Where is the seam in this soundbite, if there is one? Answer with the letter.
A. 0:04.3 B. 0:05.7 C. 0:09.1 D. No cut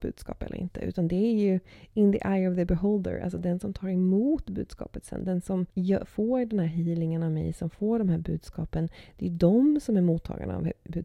B